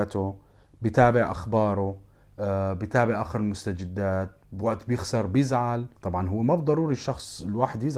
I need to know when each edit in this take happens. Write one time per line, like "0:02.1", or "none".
0:06.0